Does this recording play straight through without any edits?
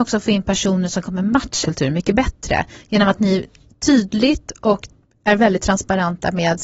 no; 1 cut; at 1.6 s

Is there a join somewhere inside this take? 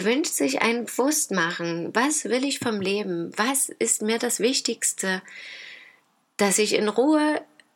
no; 0 cuts

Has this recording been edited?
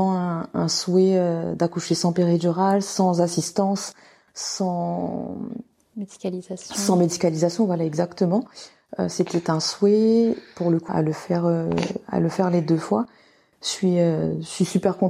yes; 1 cut; at 10.9 s

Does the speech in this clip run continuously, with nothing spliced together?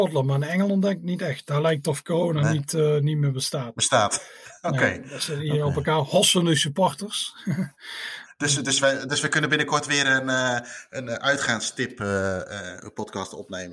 yes; 0 cuts

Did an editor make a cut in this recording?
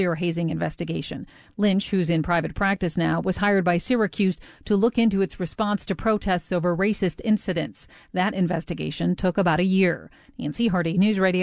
no; 0 cuts

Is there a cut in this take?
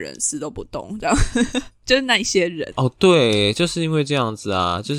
yes; 1 cut; at 2.7 s

